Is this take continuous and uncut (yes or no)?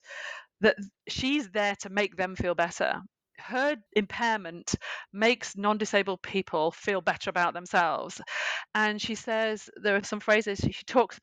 no